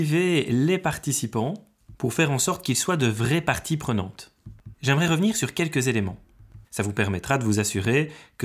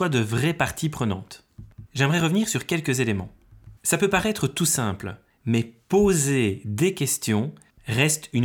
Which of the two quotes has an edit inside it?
first; 1 cut; at 6.7 s

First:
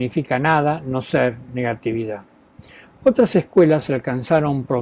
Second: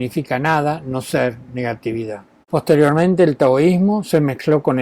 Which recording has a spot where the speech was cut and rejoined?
second; 1 cut; at 2.4 s

